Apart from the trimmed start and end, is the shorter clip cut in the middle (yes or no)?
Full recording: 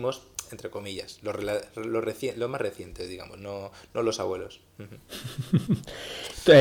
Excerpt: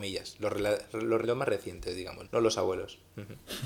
yes